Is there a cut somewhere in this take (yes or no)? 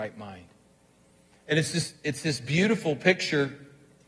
no